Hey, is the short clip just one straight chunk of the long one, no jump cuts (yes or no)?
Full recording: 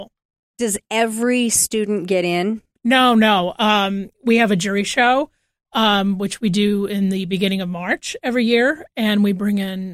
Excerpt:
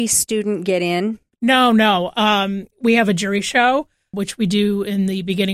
no